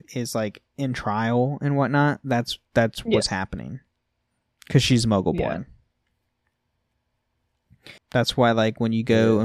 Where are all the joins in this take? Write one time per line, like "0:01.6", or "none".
0:08.0